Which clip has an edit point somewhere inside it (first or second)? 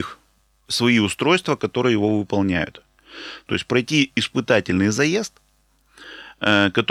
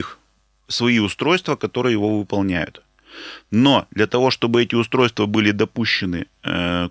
first